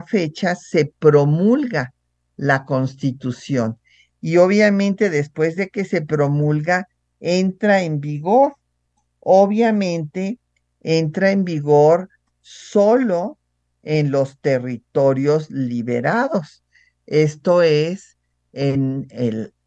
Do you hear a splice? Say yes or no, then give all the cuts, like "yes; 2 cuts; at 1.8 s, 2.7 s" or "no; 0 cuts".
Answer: no; 0 cuts